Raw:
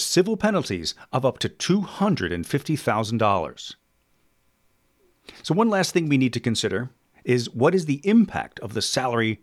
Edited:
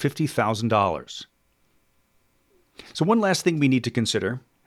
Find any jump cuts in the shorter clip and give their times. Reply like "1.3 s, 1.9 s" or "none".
none